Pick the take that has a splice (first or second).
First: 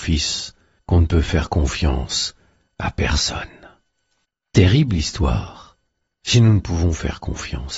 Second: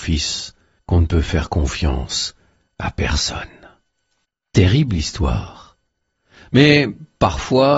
first